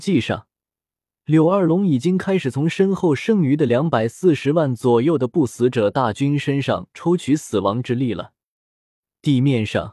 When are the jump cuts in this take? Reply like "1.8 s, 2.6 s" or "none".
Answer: none